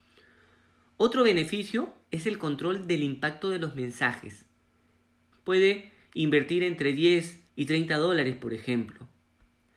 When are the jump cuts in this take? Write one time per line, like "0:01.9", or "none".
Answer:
0:05.3
0:07.5